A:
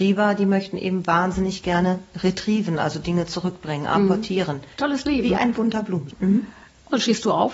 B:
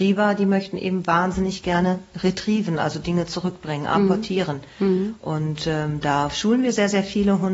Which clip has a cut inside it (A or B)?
A